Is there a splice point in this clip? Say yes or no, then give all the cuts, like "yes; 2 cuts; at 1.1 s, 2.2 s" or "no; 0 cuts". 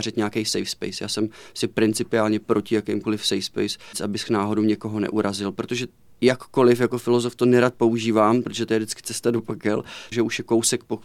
yes; 3 cuts; at 3.9 s, 8.4 s, 10.1 s